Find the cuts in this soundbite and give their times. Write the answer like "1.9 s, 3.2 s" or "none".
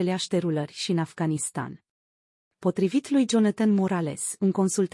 2.5 s